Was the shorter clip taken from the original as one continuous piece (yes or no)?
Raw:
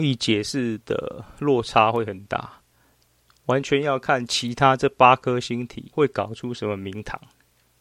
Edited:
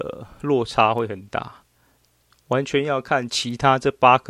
yes